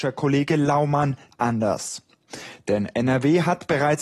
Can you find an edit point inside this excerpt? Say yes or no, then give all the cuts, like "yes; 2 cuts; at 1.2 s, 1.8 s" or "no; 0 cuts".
yes; 1 cut; at 1.3 s